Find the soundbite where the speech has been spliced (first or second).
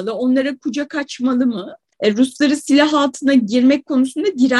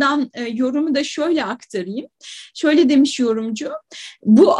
first